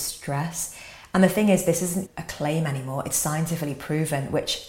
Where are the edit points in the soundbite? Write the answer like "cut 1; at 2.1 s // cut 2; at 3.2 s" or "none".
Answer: cut 1; at 2.1 s